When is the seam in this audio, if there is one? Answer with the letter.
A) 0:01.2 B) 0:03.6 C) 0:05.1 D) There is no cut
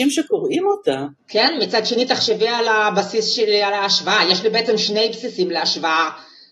A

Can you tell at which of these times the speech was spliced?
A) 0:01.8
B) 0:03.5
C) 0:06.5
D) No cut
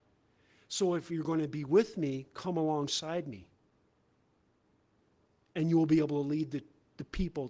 D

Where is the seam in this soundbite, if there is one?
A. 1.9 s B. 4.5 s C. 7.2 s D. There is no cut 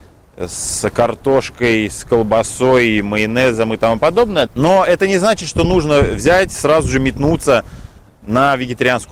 B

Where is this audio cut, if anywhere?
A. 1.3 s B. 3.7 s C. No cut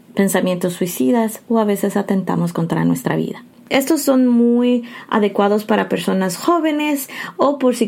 B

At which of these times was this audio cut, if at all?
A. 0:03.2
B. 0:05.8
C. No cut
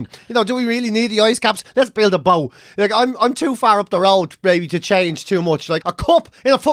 B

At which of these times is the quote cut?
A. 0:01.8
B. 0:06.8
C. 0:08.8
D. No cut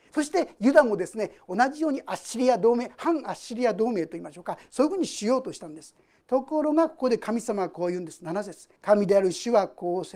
C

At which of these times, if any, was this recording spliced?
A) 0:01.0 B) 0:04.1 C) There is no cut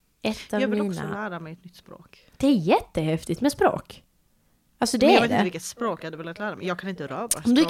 C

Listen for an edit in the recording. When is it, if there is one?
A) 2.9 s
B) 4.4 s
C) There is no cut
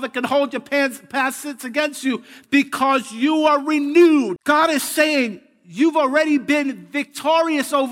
B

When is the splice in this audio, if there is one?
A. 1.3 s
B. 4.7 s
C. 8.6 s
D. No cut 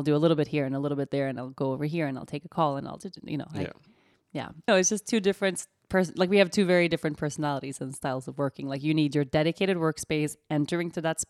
B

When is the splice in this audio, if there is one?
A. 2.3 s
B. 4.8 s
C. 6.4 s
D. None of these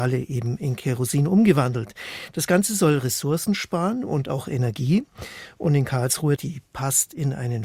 C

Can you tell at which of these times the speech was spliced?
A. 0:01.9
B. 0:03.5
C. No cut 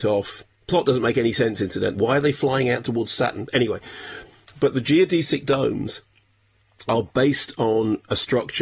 A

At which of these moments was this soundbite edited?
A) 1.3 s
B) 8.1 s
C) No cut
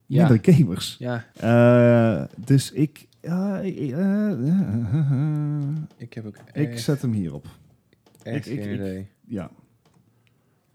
A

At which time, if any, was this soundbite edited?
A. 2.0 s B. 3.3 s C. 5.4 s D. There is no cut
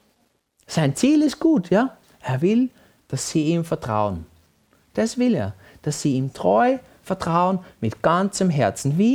A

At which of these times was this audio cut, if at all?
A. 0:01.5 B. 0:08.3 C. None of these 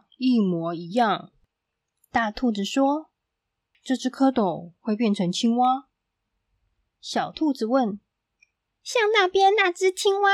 A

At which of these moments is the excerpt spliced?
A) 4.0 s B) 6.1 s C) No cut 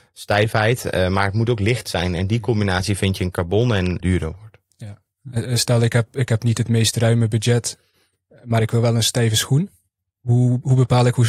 A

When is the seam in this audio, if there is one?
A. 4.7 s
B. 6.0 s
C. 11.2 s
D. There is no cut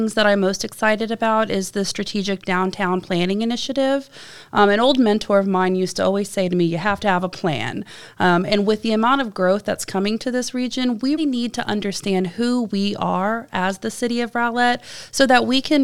C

